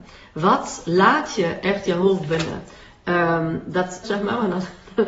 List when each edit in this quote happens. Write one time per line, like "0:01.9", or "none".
0:04.0